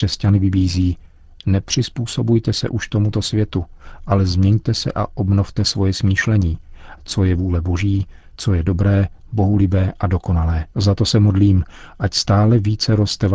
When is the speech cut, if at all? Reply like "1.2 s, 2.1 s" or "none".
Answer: 7.0 s, 10.7 s